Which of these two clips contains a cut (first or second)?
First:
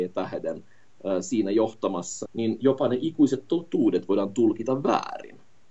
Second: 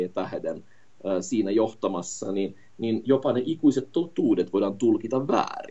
first